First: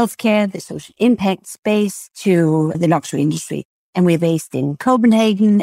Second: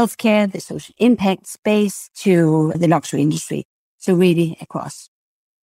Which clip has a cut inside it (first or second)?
first